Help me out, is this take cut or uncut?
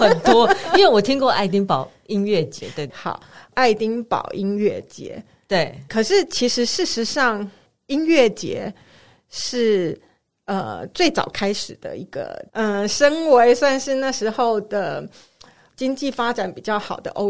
cut